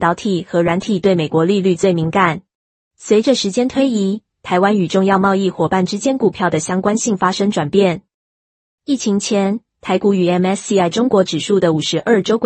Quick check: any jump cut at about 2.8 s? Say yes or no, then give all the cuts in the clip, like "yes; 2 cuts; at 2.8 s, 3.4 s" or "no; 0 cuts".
yes; 1 cut; at 2.8 s